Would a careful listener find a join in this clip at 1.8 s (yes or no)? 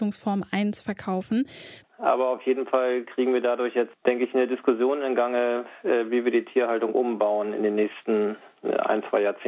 yes